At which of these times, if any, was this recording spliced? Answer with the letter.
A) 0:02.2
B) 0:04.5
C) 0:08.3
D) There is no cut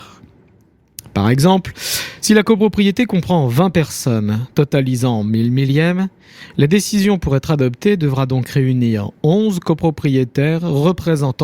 D